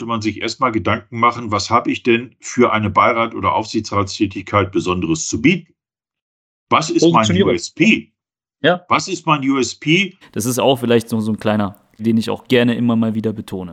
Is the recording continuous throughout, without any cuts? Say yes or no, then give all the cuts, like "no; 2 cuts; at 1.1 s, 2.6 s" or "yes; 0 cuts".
no; 2 cuts; at 10.2 s, 12.0 s